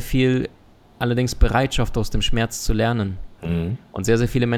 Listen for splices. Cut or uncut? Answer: uncut